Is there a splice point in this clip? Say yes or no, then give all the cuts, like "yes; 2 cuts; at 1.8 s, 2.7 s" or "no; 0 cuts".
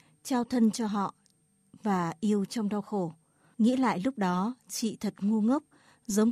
yes; 1 cut; at 3.5 s